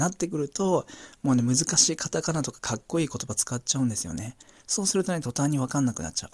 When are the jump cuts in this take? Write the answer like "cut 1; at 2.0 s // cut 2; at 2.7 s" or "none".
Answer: none